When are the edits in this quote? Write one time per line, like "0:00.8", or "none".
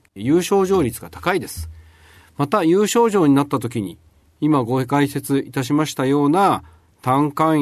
none